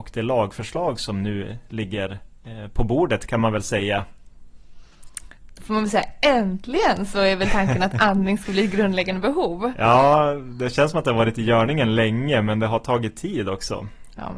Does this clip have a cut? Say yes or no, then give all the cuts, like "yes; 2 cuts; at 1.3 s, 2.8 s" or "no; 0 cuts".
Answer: no; 0 cuts